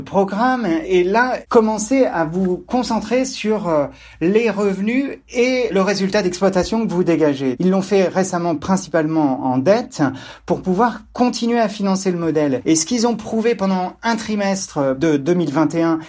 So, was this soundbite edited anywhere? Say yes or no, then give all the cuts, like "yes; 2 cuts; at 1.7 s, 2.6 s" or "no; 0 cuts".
yes; 1 cut; at 7.6 s